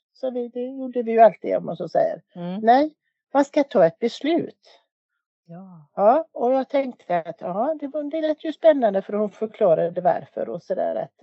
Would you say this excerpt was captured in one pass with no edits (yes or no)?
yes